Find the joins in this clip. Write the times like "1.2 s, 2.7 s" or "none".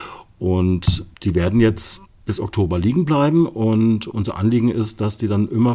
1.1 s